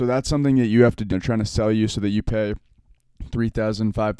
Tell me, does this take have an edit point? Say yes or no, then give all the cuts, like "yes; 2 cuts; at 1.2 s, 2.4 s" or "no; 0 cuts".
yes; 1 cut; at 1.1 s